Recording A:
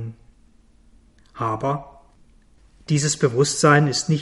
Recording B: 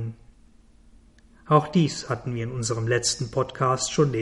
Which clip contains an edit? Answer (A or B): A